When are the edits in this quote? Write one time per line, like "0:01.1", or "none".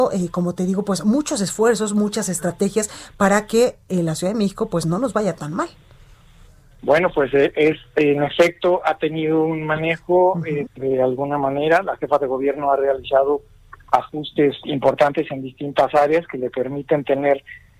0:10.7